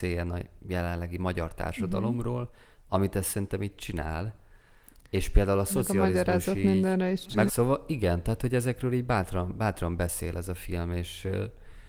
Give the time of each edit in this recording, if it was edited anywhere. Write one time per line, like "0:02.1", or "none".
0:07.5

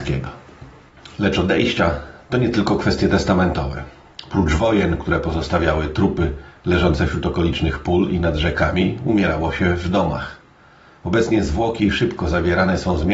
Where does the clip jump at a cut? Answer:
none

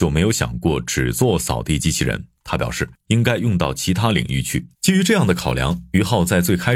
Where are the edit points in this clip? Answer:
0:03.1
0:04.7

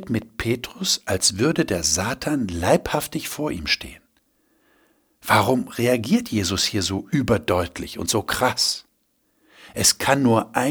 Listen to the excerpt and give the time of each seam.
none

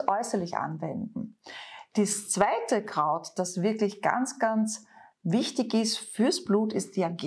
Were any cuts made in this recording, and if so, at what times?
none

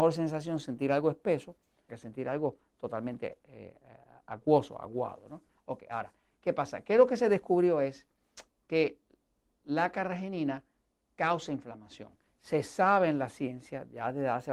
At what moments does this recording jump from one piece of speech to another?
0:01.9

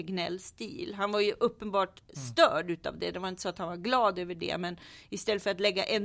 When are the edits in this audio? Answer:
none

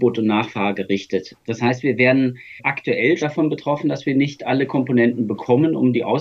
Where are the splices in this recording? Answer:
0:01.4
0:03.2

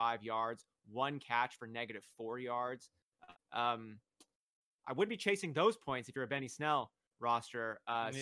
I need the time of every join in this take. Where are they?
0:03.3

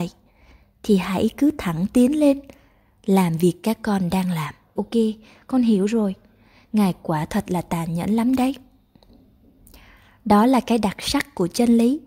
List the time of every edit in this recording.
0:04.8

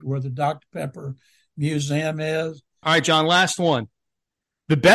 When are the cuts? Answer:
0:02.8

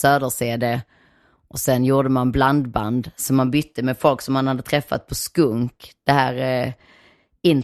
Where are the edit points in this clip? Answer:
none

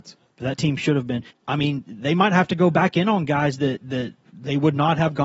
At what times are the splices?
0:01.3

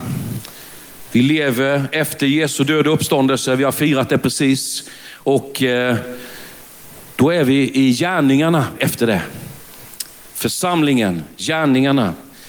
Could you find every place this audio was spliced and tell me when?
none

